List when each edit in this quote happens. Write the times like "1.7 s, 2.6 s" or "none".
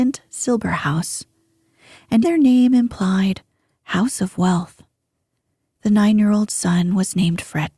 2.2 s, 5.7 s

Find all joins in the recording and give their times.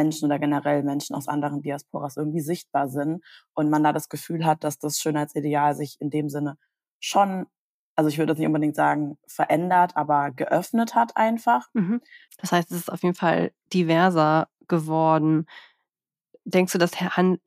12.3 s

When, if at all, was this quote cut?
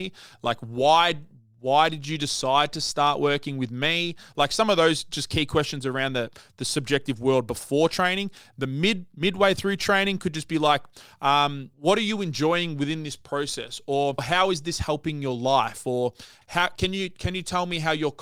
11.7 s, 16.4 s

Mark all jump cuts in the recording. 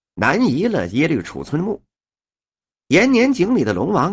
none

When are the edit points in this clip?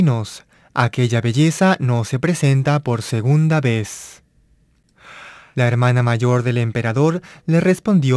5.5 s

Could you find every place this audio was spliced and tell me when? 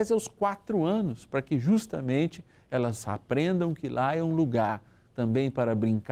none

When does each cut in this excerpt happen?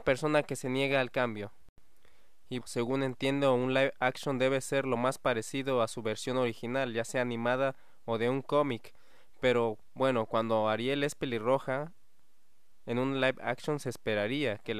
2.6 s

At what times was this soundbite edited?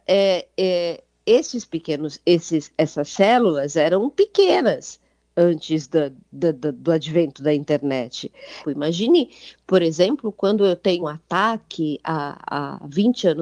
8.6 s, 11.0 s

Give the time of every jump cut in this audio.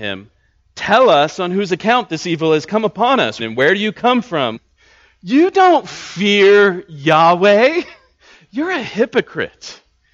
3.4 s, 4.5 s

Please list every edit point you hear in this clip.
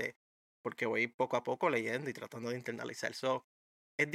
none

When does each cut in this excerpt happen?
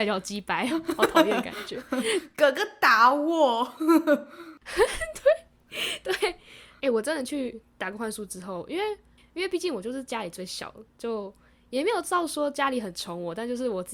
6.8 s, 9.2 s

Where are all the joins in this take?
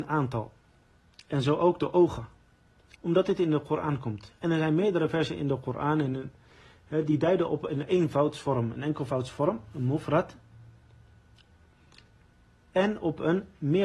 2.9 s

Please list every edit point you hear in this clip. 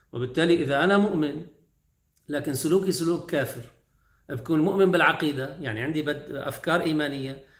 none

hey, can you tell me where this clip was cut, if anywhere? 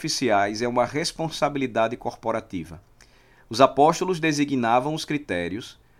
none

